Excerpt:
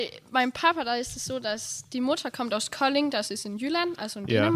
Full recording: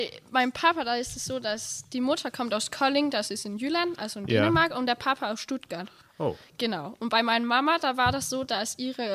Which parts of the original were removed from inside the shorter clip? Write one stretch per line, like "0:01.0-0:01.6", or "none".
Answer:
none

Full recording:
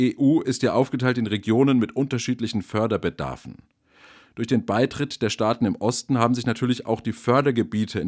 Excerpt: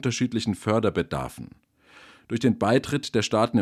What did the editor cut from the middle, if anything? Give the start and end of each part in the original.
none

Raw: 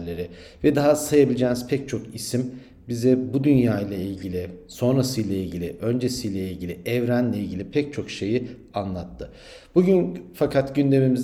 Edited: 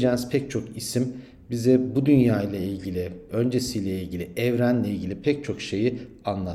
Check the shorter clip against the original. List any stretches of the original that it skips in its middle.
0:04.7-0:05.8

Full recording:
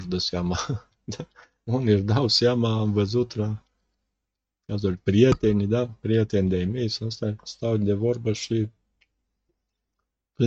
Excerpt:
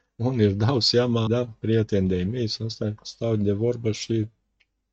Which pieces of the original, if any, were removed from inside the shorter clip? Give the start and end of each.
0:02.7-0:05.7

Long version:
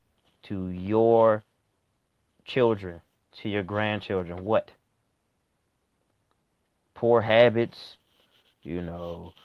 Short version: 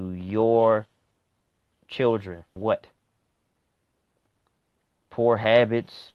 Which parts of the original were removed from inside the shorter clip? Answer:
0:03.1-0:04.4

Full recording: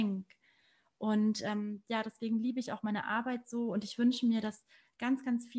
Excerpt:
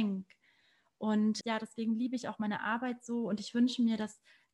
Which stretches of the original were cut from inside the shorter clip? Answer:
0:01.4-0:01.8

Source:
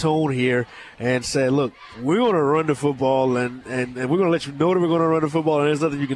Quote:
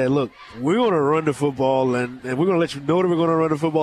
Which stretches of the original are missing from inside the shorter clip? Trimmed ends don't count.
0:03.6-0:03.9

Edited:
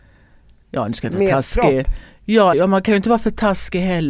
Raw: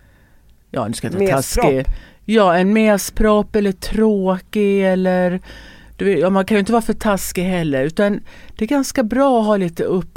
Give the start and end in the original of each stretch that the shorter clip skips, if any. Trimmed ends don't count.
0:02.5-0:06.2

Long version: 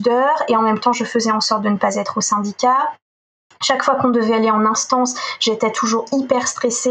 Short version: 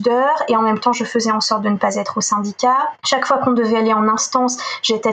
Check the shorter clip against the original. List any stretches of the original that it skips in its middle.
0:03.0-0:03.6

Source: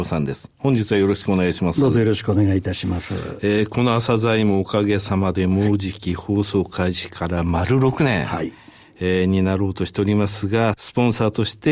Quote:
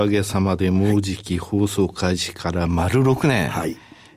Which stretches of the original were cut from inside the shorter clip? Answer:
none

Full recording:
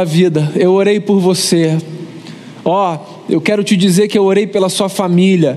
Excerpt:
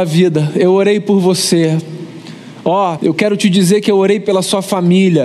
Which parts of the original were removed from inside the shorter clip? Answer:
0:03.0-0:03.2

